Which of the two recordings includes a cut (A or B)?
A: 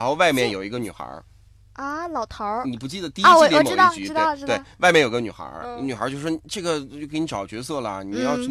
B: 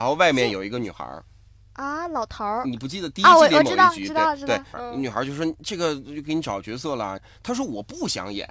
B